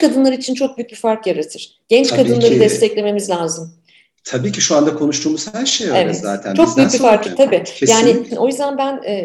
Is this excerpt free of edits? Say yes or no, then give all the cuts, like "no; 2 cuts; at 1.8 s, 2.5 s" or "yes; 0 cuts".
no; 2 cuts; at 7.2 s, 8.3 s